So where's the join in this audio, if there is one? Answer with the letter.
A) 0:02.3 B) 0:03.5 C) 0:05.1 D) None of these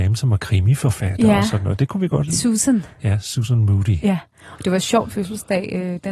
C